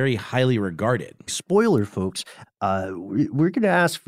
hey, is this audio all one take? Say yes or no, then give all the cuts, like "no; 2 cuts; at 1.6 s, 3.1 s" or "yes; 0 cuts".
no; 2 cuts; at 1.3 s, 2.4 s